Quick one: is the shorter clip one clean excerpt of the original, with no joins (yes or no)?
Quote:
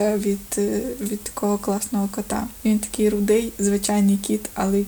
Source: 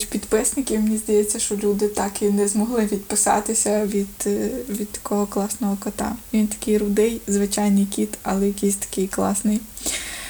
yes